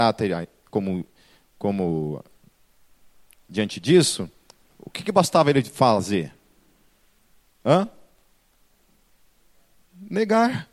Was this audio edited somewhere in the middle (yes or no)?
no